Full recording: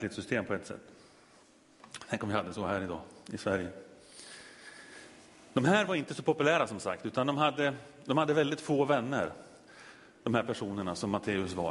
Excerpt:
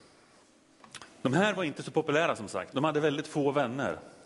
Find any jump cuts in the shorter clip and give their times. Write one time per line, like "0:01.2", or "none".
0:01.1
0:02.7